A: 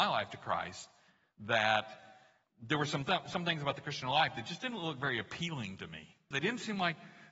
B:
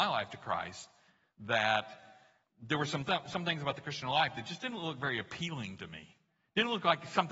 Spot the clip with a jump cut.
A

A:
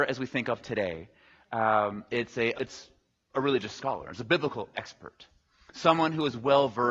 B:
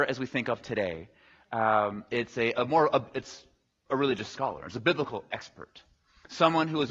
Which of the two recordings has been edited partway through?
A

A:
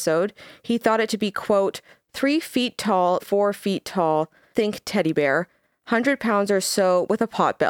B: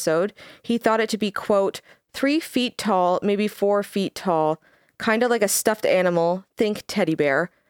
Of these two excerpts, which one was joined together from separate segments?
A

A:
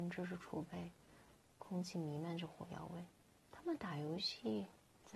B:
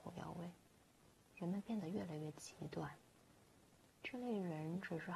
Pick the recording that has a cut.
A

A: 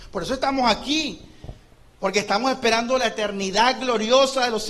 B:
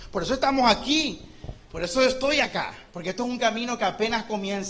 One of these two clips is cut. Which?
B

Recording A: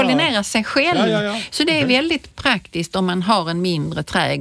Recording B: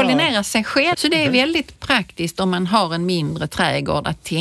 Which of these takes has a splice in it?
B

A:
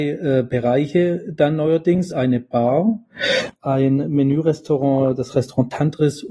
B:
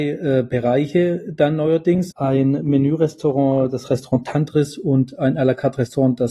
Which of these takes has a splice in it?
B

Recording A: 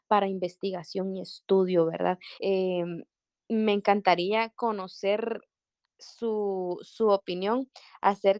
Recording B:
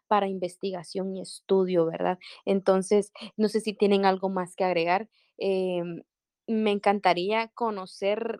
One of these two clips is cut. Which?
A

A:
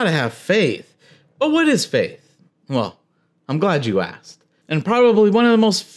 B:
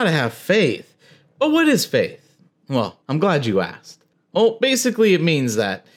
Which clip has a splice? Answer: B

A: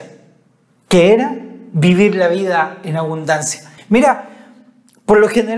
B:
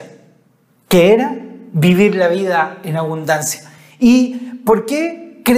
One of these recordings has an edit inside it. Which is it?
A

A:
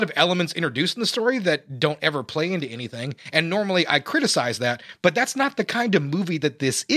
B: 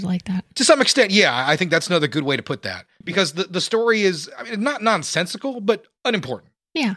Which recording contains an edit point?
B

